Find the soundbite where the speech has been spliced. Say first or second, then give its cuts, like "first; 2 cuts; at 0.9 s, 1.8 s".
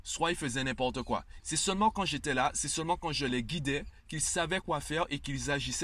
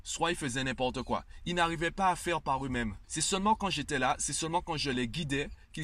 first; 1 cut; at 1.4 s